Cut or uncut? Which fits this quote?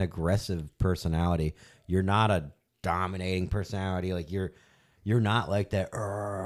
uncut